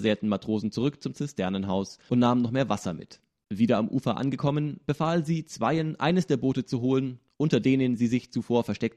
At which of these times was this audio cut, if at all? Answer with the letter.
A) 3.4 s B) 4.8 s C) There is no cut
C